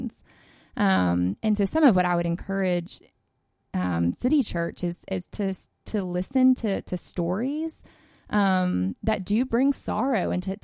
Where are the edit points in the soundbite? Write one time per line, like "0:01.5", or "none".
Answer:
none